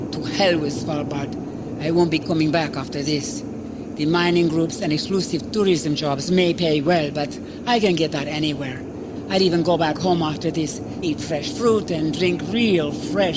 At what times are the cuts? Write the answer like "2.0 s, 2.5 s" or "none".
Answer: 11.0 s

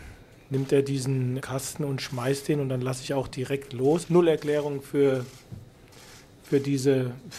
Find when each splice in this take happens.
1.4 s, 4.0 s

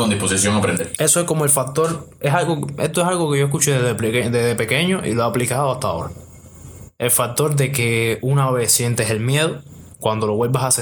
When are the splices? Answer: 1.0 s

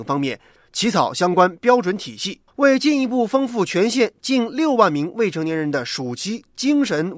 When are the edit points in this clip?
2.5 s

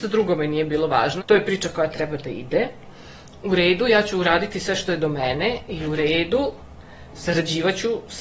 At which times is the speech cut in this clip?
1.2 s

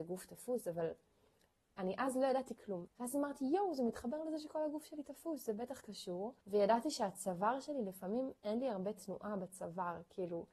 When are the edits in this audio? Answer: 2.9 s, 6.4 s

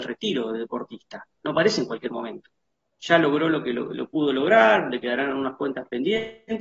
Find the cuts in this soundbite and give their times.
none

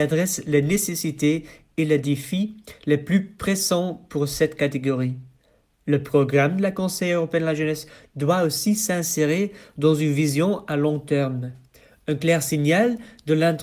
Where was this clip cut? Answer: none

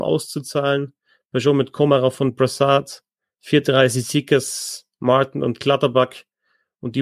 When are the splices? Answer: none

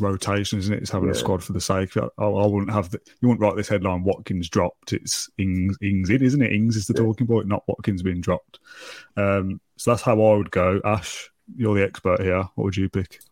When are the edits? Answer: none

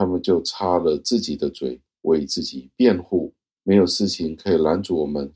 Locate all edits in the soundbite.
3.6 s

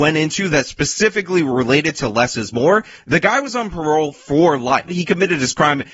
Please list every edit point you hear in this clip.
4.9 s

